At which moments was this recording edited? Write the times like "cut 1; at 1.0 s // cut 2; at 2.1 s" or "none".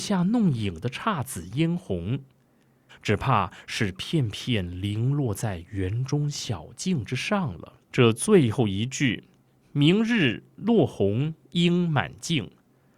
cut 1; at 2.9 s // cut 2; at 7.8 s

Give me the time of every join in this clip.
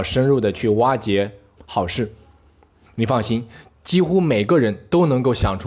cut 1; at 1.6 s

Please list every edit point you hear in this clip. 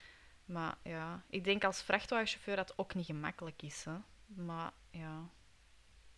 cut 1; at 4.3 s

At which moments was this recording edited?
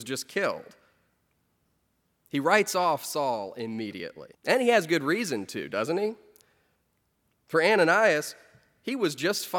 cut 1; at 4.3 s

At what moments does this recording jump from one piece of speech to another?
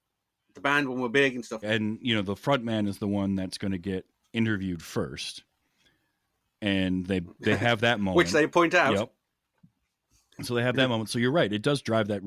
cut 1; at 1.6 s

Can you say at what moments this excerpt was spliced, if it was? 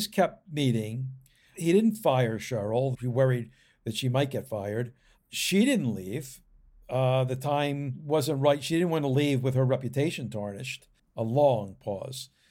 cut 1; at 2.9 s // cut 2; at 11.0 s

